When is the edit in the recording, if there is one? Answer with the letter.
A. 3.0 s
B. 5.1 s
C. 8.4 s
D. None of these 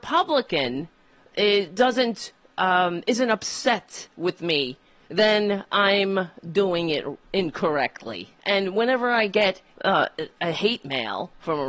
C